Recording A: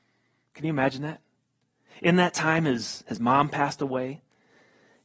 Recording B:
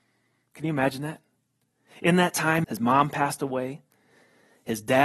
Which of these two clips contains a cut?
B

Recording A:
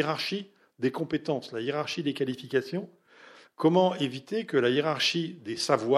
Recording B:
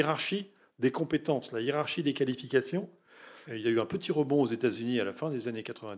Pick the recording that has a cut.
B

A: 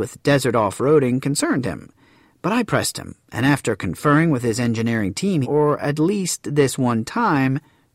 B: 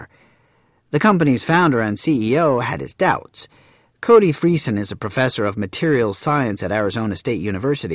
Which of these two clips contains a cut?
A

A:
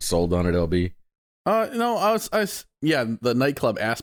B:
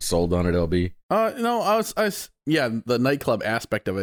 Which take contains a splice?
B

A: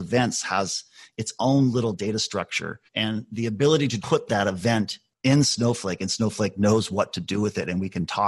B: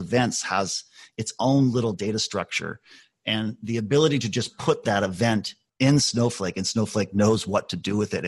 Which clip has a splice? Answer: A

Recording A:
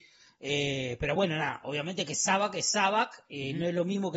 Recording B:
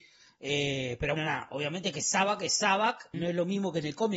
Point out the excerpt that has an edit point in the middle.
B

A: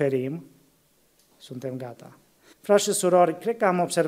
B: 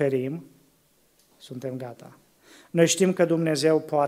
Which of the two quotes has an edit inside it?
A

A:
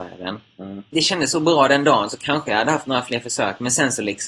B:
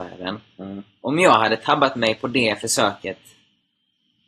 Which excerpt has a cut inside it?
A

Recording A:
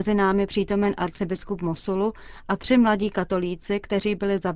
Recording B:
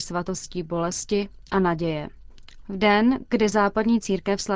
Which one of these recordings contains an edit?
B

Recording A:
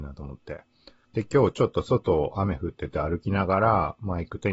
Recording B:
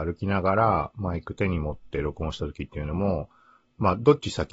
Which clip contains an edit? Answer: A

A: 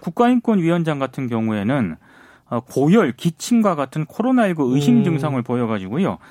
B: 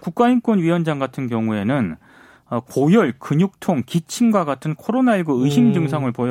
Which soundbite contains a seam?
A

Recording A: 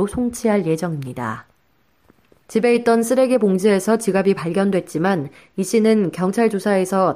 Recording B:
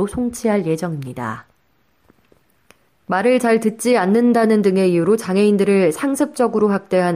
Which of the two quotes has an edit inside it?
A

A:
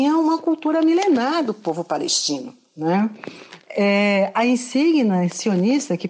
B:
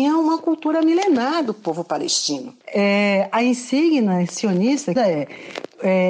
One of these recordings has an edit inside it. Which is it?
B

